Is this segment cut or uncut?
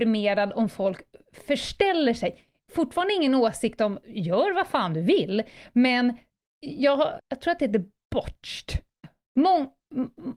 cut